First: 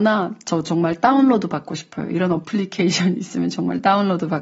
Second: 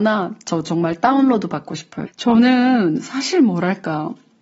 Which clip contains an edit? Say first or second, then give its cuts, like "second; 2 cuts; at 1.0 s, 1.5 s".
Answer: second; 1 cut; at 2.1 s